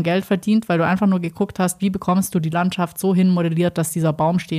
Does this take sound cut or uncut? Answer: uncut